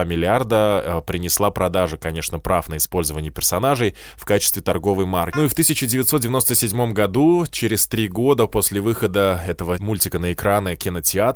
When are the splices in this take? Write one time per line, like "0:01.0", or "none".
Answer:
0:05.3